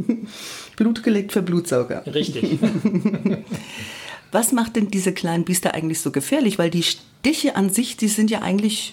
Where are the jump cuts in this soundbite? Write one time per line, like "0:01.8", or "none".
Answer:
none